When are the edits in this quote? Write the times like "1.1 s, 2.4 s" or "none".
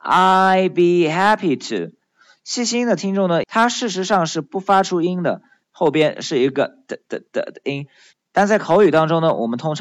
3.4 s, 5.6 s, 8.1 s

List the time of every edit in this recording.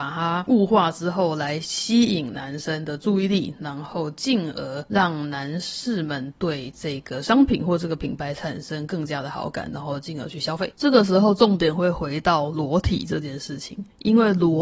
10.7 s

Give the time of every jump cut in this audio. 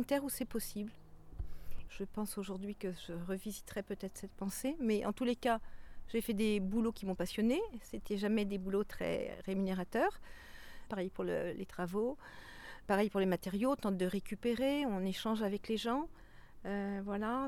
1.9 s, 10.9 s, 12.8 s

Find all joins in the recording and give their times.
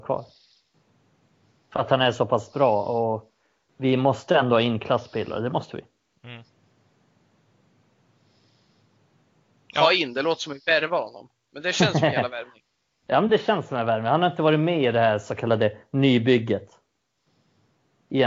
none

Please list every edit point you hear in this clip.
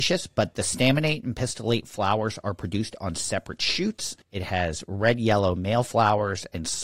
4.2 s

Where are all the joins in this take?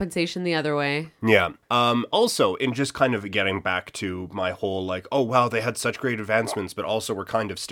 1.6 s

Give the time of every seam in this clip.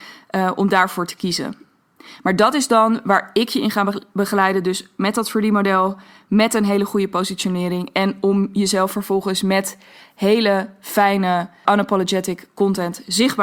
11.6 s

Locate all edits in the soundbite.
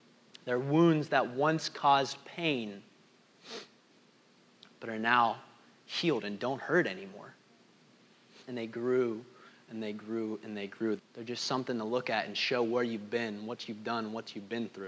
8.4 s, 11.0 s

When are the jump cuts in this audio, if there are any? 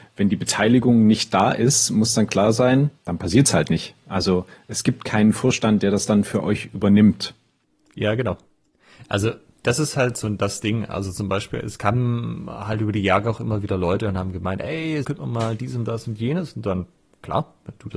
3.0 s, 15.0 s

